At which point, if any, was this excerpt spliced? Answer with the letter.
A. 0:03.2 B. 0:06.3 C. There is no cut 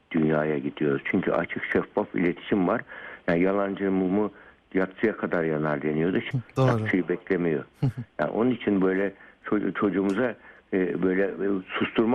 B